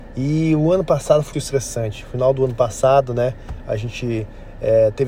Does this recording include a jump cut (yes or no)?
yes